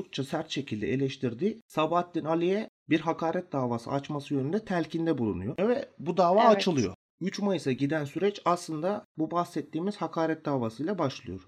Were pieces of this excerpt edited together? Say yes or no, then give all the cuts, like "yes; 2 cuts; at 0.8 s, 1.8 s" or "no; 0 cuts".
no; 0 cuts